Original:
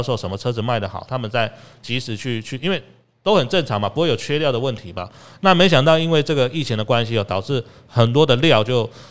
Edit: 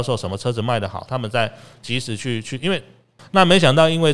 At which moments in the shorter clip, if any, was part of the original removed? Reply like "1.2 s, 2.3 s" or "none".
3.2 s